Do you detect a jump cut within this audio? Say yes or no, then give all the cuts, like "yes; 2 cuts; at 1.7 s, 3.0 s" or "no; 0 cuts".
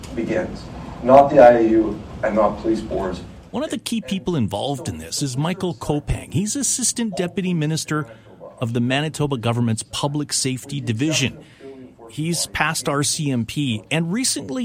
no; 0 cuts